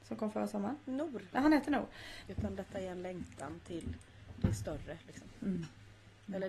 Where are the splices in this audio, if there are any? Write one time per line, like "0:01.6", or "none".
0:02.2

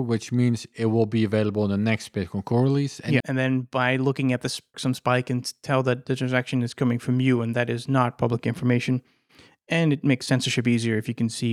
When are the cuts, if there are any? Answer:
0:03.2
0:04.7

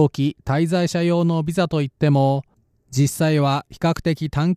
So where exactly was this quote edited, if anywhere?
none

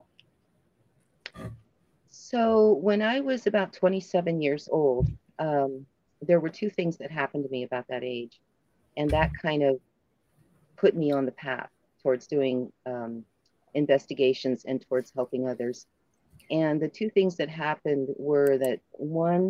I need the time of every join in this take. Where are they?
none

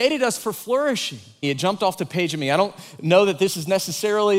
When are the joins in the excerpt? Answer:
0:01.4

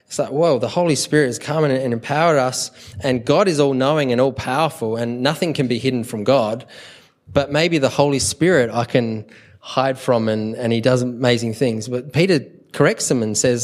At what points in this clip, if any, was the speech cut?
none

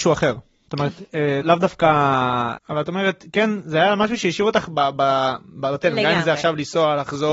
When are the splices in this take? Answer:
0:01.4
0:02.6

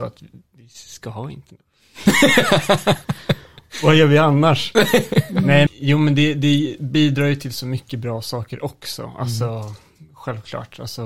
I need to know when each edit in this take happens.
0:05.7

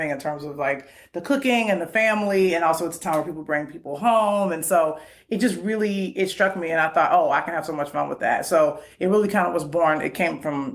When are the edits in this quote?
none

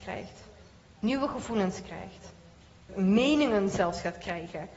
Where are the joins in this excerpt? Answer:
0:02.9

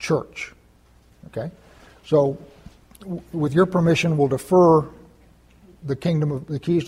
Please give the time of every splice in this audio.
none

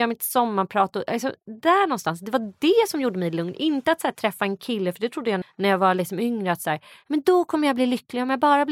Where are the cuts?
0:05.4

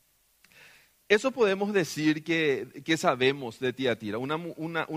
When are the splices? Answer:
none

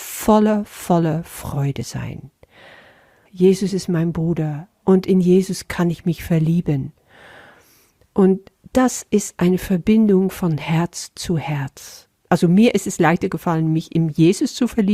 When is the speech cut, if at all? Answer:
0:03.3
0:12.2

